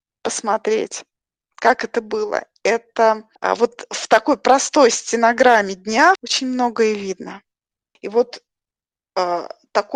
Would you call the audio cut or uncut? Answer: cut